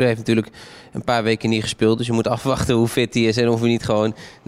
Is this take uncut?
yes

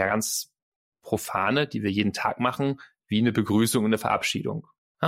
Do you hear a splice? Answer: no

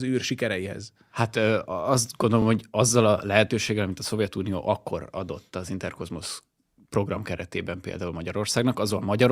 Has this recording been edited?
no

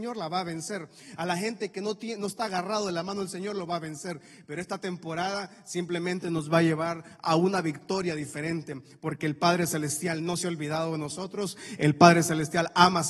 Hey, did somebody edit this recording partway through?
no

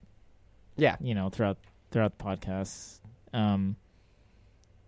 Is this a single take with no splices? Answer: yes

